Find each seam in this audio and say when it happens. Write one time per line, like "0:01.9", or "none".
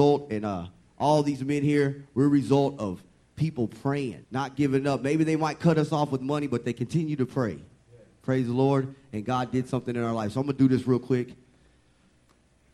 0:04.2